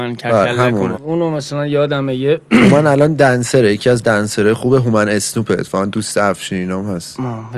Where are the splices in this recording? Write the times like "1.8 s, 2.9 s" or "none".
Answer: 1.0 s